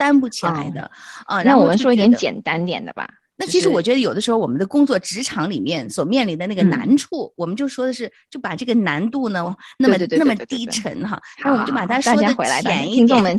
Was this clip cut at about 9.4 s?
yes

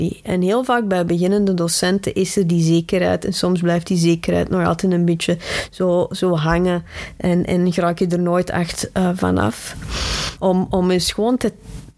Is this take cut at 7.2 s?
no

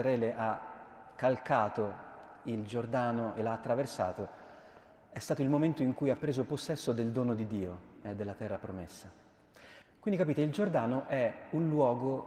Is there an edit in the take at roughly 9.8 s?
yes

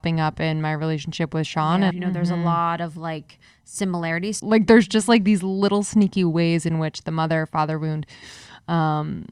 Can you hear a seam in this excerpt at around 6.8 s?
no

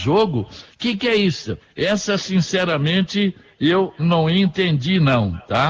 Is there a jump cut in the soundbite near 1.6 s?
yes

